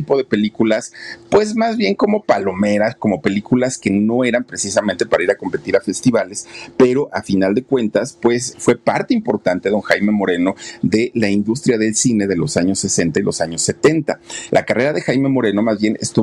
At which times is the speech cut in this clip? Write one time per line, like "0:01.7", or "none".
0:08.5
0:14.5

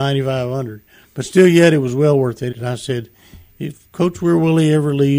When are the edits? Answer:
0:02.5

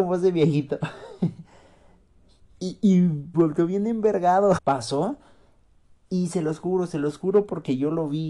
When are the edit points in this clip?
0:03.3
0:04.6

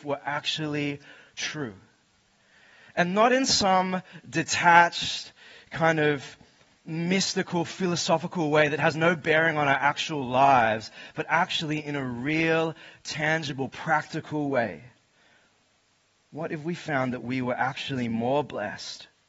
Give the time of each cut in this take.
none

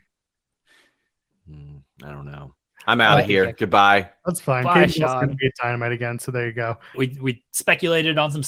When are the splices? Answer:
0:06.9

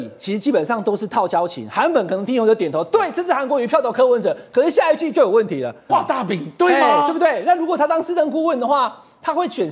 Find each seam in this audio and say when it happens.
0:02.3
0:05.9

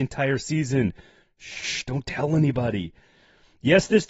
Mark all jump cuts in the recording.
none

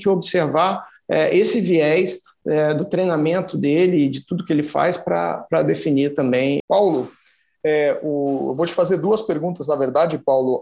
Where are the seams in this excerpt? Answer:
0:06.6

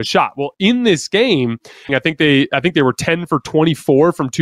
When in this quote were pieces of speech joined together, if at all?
0:01.9

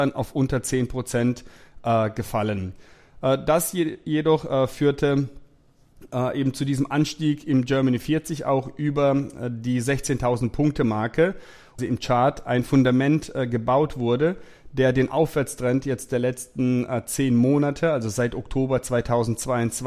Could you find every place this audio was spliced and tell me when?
0:11.8

